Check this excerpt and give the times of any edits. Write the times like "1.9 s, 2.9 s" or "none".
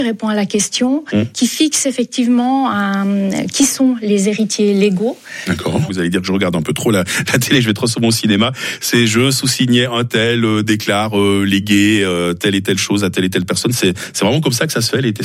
5.9 s